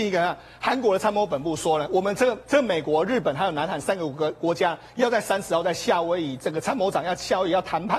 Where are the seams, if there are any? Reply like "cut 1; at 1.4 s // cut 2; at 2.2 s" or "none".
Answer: none